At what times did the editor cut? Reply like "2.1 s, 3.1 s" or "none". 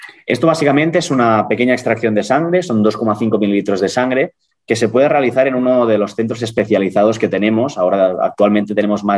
none